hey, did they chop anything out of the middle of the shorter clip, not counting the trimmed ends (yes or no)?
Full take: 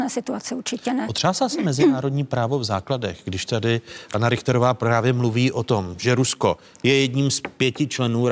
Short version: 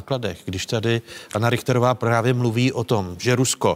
no